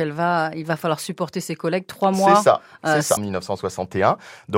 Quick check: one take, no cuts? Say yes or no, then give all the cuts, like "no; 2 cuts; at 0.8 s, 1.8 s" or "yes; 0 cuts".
no; 1 cut; at 3.2 s